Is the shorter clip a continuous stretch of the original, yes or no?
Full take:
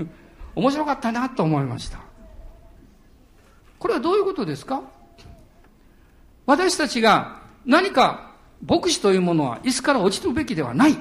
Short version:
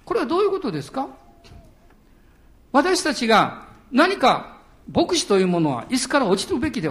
yes